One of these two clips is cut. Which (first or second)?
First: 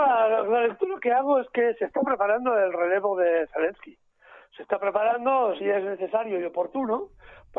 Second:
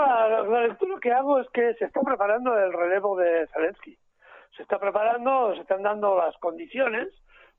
first